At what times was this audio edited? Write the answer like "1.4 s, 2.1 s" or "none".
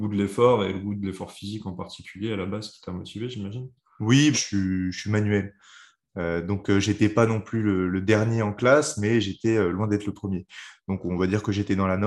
4.3 s